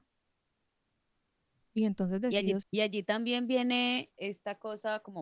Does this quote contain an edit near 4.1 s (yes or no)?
yes